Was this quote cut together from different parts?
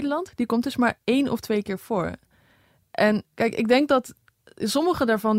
no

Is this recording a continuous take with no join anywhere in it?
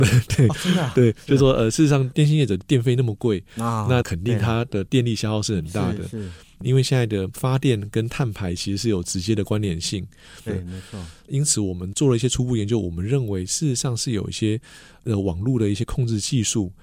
no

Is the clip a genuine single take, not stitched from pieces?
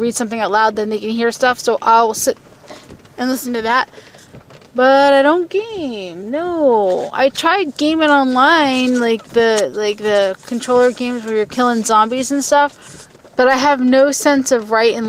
yes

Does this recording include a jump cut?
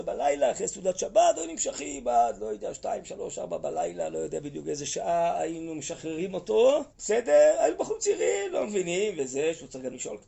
yes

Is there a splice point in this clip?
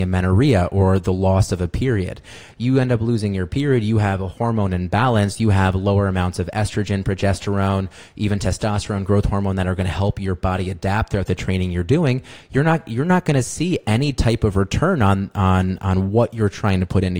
no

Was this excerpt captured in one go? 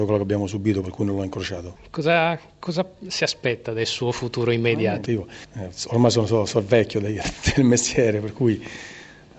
no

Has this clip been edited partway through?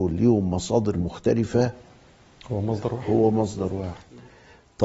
no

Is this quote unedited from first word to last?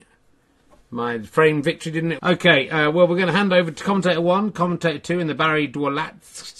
no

